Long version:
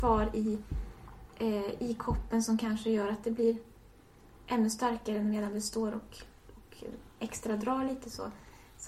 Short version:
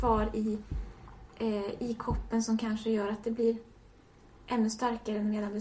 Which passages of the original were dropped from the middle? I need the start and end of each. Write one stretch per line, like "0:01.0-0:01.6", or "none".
none